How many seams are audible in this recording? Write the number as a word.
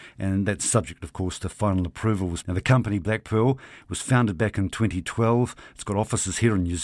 one